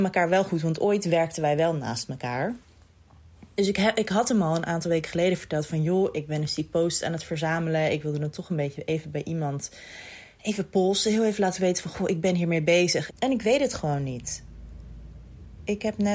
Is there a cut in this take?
yes; 1 cut; at 13.1 s

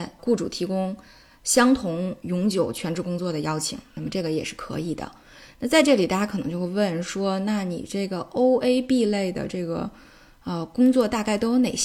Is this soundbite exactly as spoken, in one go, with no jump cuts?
yes; 0 cuts

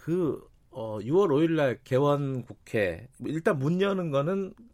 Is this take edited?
yes; 1 cut; at 3.1 s

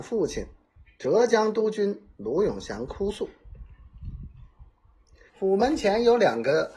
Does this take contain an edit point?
yes; 1 cut; at 5.3 s

